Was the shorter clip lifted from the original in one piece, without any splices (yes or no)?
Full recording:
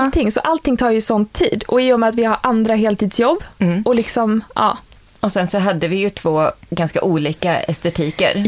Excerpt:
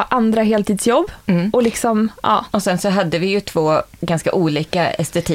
no